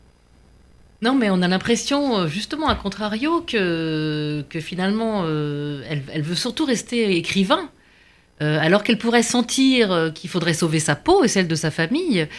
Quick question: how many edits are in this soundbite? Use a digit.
0